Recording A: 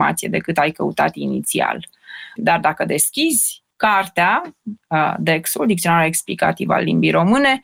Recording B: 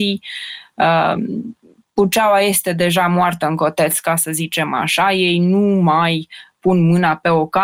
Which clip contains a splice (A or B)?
A